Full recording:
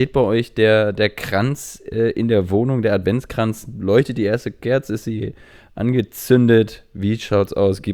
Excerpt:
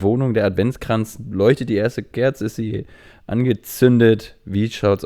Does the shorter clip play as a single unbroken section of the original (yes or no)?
yes